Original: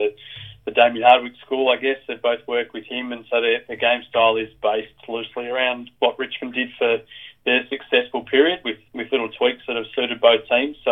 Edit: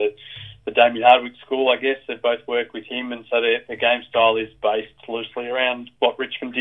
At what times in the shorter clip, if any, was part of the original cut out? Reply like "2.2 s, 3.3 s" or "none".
none